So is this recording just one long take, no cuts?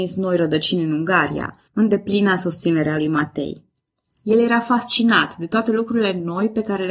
no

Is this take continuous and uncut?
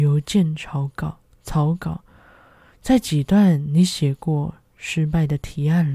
yes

